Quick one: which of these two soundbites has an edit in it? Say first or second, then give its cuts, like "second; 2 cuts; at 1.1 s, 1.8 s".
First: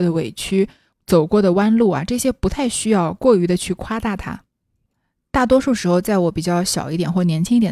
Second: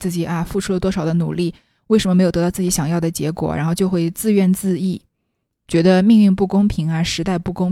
first; 1 cut; at 0.9 s